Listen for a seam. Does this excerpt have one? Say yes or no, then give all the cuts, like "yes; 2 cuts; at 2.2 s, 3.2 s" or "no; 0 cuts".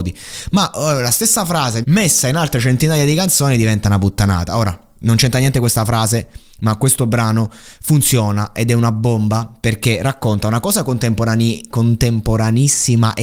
yes; 1 cut; at 1.8 s